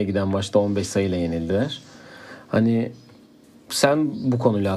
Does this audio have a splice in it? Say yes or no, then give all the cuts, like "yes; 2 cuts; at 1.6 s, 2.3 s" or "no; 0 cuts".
no; 0 cuts